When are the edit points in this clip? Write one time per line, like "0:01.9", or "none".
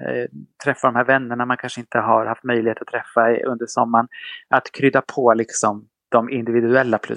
none